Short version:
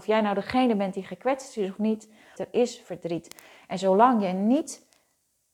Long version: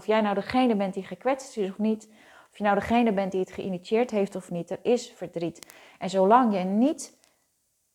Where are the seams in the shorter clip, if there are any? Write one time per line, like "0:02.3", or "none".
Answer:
0:02.3